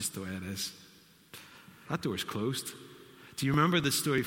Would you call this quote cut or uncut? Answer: cut